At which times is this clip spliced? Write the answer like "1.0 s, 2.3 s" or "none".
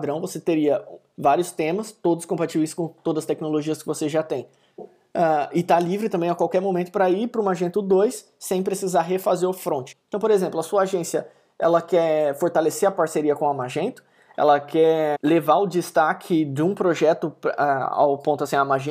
9.9 s